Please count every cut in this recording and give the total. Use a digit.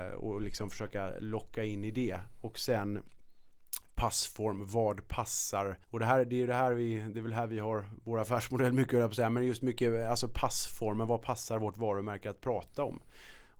1